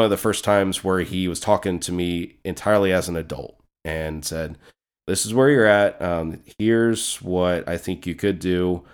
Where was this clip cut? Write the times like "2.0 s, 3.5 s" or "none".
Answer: none